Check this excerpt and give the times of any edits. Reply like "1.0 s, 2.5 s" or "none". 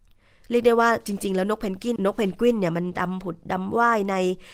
2.0 s